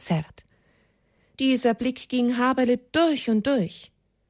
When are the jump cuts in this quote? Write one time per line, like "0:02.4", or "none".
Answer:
0:01.3